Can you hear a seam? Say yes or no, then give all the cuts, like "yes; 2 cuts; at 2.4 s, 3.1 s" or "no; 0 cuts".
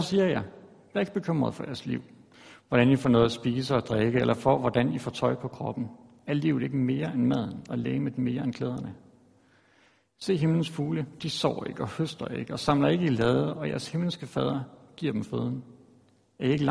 no; 0 cuts